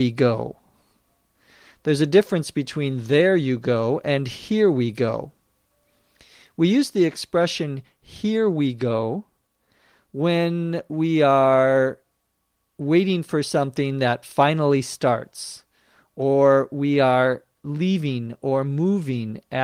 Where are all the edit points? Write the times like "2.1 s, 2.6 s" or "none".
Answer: none